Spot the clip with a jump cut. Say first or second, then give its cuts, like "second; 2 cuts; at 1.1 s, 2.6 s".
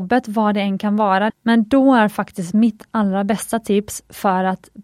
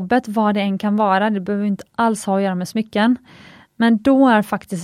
first; 1 cut; at 1.3 s